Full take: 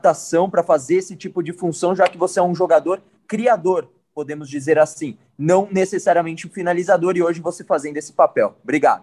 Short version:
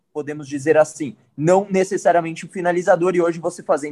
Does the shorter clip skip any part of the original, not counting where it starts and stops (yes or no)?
no